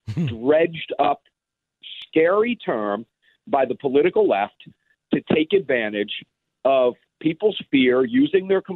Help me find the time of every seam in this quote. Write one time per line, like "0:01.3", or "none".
none